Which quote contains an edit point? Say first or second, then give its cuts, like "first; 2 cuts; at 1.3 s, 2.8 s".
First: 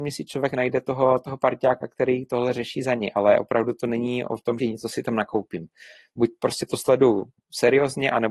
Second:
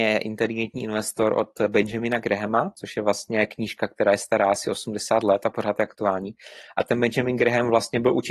first; 1 cut; at 4.6 s